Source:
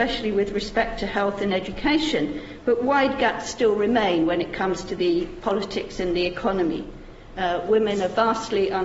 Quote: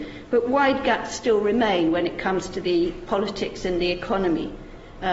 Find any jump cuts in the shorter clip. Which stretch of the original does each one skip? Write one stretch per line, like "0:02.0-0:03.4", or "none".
none